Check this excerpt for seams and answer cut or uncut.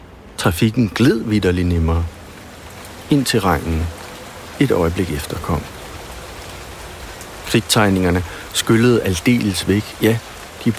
uncut